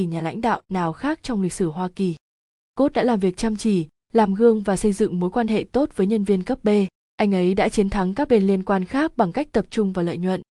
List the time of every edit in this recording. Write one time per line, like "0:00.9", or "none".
none